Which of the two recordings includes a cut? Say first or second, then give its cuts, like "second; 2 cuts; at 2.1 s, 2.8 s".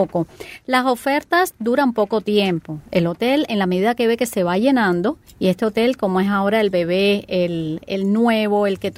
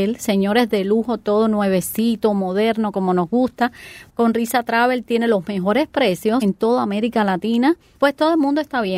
second; 3 cuts; at 4.1 s, 6.4 s, 7.9 s